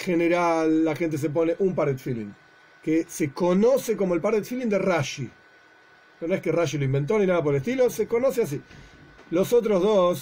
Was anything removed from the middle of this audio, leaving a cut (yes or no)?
yes